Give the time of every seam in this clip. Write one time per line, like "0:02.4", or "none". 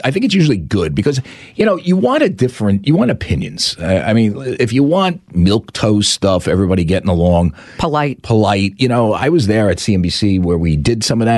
none